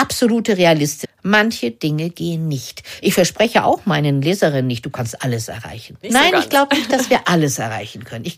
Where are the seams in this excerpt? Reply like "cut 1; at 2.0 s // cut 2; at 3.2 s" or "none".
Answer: cut 1; at 1.0 s // cut 2; at 6.0 s